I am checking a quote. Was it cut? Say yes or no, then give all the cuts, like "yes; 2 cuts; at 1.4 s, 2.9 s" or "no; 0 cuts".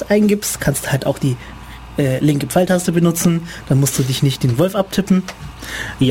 no; 0 cuts